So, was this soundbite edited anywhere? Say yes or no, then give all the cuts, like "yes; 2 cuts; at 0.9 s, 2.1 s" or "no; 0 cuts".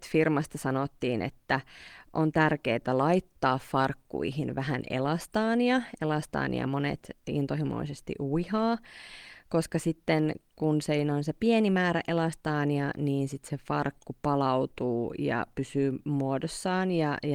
no; 0 cuts